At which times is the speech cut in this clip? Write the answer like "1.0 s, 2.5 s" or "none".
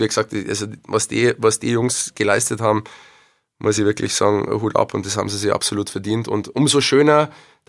none